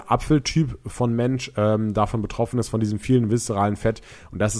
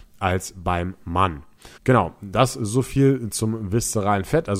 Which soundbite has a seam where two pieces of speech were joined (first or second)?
second